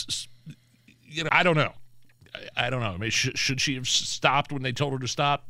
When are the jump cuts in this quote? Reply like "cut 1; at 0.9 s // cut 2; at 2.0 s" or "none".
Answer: cut 1; at 1.3 s